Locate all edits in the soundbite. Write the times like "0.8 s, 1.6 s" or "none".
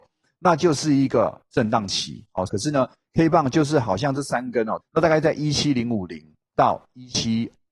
2.5 s, 4.8 s